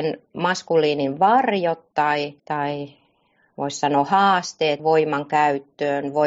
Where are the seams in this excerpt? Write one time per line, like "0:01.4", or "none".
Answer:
0:02.4
0:04.8